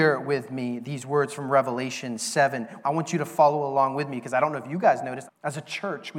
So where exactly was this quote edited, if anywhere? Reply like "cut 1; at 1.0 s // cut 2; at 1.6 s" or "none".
cut 1; at 2.8 s // cut 2; at 5.3 s